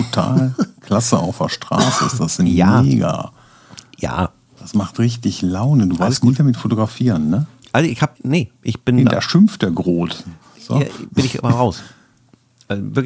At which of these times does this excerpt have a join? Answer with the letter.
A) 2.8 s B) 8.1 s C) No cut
B